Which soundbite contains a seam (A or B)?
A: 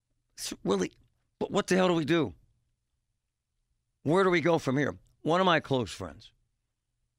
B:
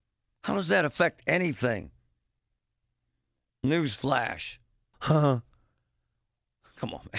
B